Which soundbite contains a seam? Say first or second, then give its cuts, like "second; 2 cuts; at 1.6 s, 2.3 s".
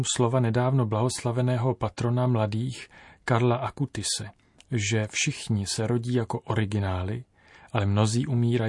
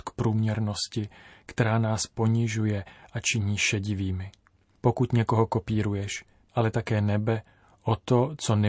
second; 2 cuts; at 4.8 s, 6.5 s